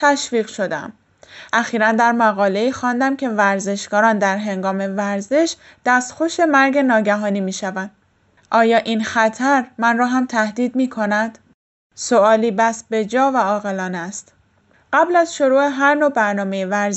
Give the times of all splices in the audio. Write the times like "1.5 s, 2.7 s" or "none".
1.5 s